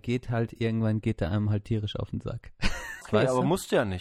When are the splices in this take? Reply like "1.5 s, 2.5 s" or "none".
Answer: 3.0 s